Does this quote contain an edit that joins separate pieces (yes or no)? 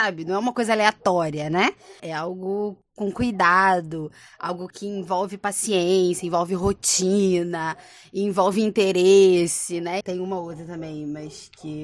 yes